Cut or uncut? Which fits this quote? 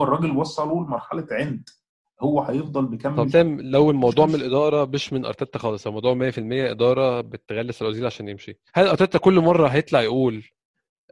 cut